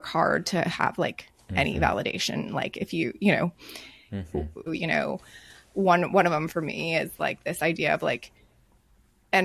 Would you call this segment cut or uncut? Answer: cut